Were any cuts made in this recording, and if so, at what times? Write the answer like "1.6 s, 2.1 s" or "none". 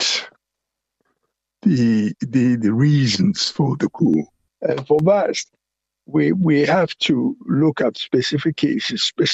4.5 s